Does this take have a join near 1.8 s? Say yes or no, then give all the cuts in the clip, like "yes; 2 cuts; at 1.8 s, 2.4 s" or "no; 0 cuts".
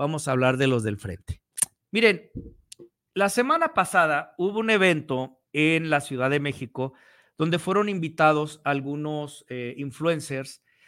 yes; 2 cuts; at 1.8 s, 5.5 s